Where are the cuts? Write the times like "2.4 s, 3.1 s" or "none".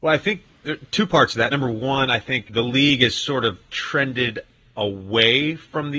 none